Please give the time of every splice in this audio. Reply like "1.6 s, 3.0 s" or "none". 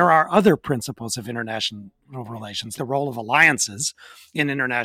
2.8 s